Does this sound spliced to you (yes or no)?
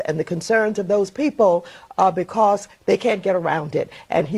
no